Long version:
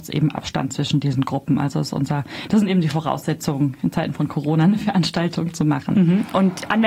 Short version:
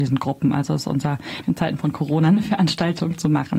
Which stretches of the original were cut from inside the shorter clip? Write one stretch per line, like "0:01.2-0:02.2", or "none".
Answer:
0:02.5-0:03.8